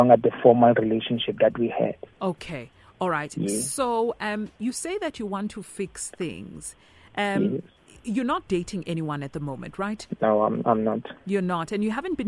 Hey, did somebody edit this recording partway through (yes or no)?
yes